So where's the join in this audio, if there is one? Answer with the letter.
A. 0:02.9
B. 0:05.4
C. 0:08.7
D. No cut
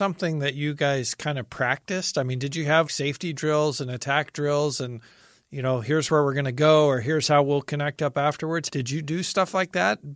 A